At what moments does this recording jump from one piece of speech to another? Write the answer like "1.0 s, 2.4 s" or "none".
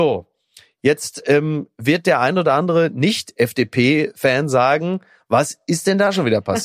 none